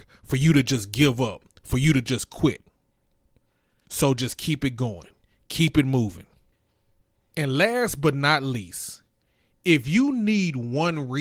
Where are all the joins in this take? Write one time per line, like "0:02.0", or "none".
none